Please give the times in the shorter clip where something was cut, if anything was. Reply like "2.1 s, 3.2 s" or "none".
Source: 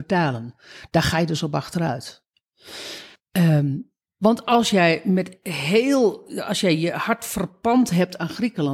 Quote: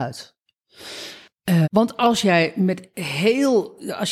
1.6 s